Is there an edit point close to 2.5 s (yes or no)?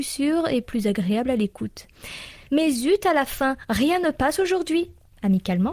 yes